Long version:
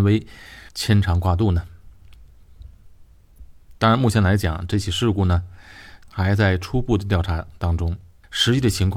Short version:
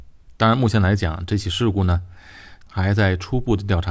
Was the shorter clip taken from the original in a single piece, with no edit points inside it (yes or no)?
yes